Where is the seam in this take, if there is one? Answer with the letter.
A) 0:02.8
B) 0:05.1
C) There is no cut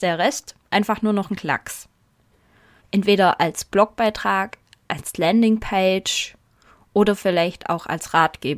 A